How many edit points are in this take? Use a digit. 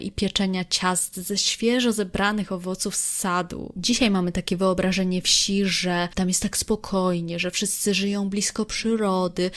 0